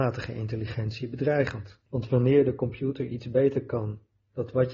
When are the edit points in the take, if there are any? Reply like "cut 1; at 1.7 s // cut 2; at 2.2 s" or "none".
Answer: cut 1; at 1.9 s